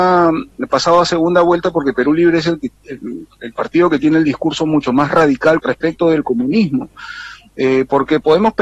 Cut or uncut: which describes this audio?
cut